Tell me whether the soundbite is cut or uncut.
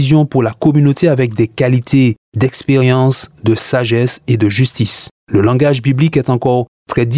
cut